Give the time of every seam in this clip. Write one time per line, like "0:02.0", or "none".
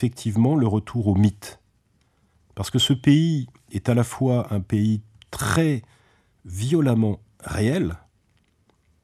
none